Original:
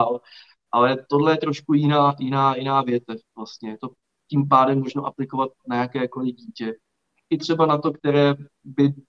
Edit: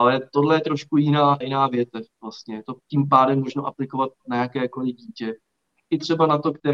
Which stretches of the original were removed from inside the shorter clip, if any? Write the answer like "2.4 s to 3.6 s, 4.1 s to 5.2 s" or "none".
2.2 s to 2.5 s, 4.0 s to 4.2 s